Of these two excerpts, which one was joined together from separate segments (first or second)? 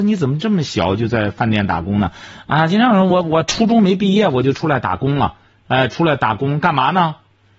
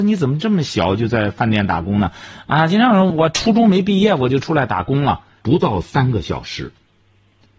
second